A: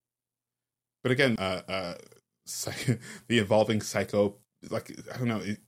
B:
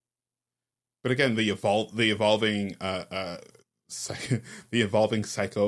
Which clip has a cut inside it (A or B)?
A